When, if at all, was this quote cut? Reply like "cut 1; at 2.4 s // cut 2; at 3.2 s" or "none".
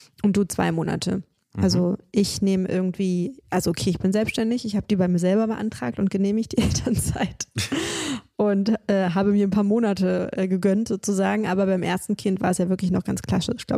cut 1; at 1.4 s